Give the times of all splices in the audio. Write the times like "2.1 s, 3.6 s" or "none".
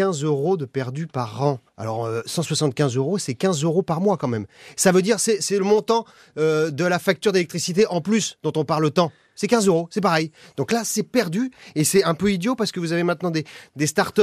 1.7 s